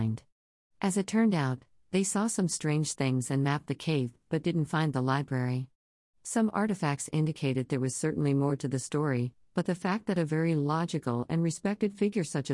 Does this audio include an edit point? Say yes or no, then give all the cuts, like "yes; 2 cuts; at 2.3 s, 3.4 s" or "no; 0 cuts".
no; 0 cuts